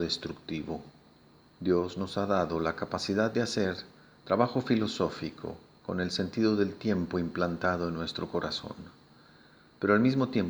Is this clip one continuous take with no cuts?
no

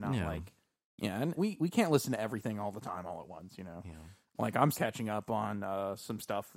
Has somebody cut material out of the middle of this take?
yes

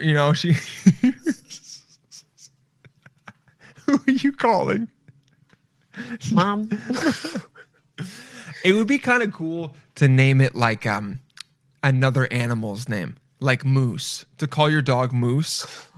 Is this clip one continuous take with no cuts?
yes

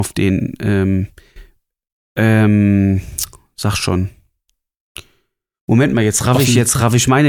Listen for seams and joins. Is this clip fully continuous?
yes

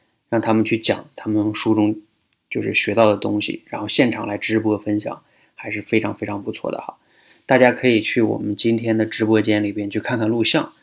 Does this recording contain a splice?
no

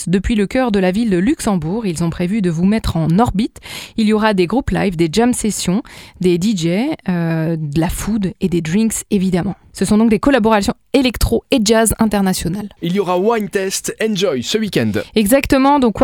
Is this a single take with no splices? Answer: yes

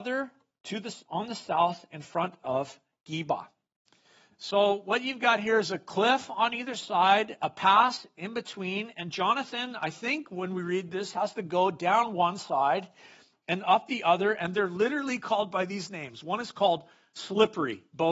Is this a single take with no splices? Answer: yes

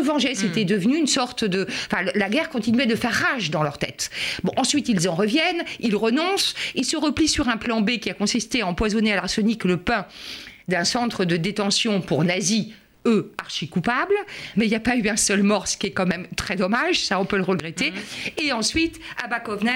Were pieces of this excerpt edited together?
yes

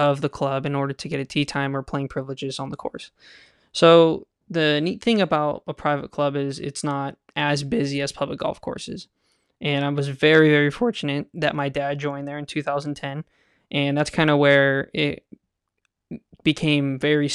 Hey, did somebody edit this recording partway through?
no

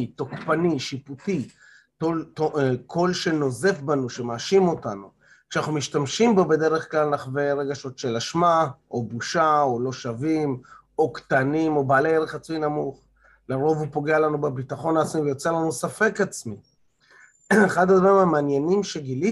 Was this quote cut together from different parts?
no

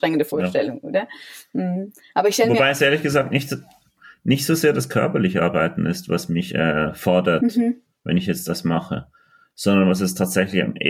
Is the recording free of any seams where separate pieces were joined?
yes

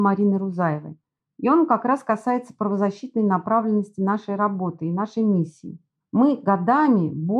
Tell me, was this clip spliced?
no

